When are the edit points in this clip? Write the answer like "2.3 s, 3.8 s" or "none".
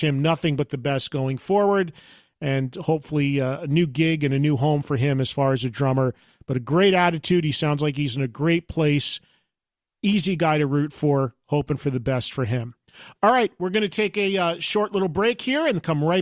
none